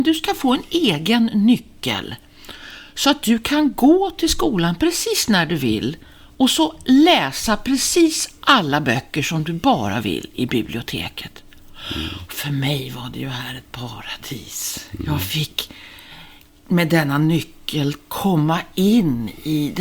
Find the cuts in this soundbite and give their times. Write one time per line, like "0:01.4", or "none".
none